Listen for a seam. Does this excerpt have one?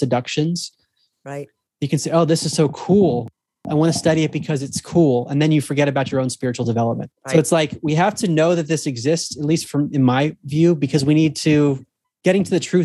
no; 0 cuts

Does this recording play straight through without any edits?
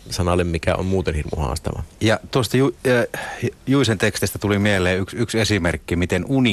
yes; 0 cuts

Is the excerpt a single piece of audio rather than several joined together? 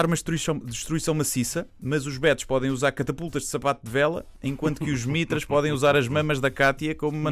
yes; 0 cuts

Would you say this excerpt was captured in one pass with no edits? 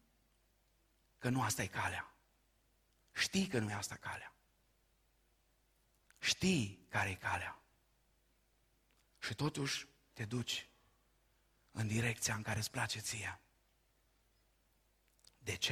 yes; 0 cuts

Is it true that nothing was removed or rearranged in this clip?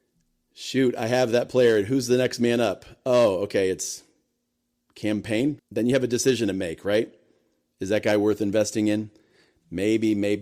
no; 1 cut; at 5.6 s

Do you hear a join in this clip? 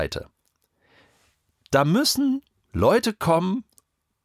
no; 0 cuts

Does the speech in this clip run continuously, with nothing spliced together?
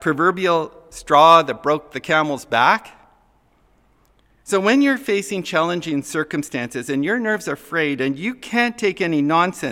yes; 0 cuts

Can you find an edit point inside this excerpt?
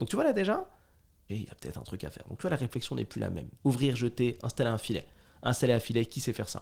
yes; 2 cuts; at 1.3 s, 3.6 s

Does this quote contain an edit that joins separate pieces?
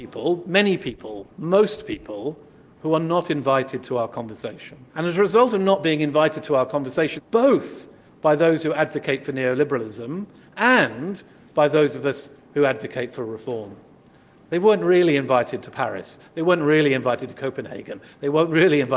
yes; 2 cuts; at 4.9 s, 7.2 s

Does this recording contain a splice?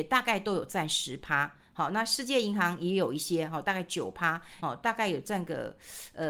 yes; 1 cut; at 4.6 s

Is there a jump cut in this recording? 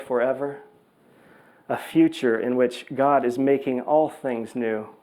no; 0 cuts

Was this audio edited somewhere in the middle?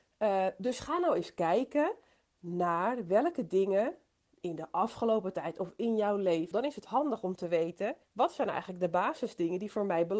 yes; 2 cuts; at 6.5 s, 8.0 s

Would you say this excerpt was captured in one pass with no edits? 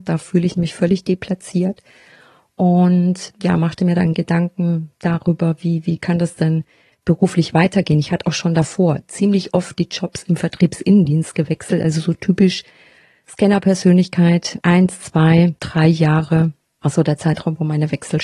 yes; 0 cuts

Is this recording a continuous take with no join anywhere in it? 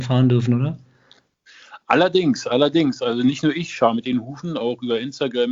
yes; 0 cuts

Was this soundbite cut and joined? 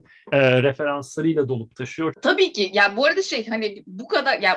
yes; 1 cut; at 2.1 s

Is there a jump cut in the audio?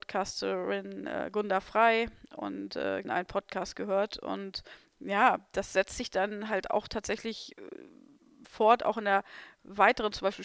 yes; 1 cut; at 3.0 s

